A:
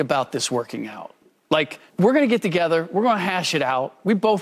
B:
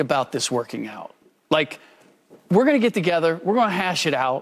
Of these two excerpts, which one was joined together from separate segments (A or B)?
A